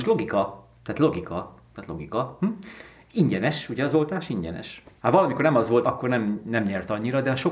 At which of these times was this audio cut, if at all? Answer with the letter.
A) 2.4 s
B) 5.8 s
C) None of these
B